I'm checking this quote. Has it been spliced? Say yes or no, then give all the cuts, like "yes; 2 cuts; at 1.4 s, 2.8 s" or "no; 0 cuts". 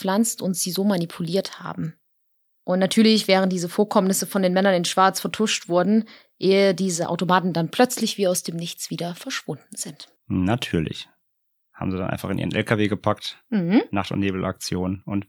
no; 0 cuts